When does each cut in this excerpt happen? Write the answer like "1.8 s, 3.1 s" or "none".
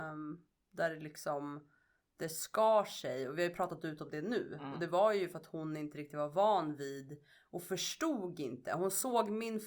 none